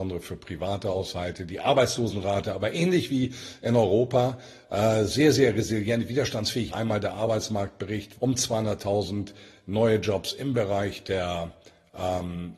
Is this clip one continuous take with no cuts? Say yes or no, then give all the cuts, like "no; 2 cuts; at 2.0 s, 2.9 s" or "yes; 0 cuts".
no; 2 cuts; at 6.7 s, 8.2 s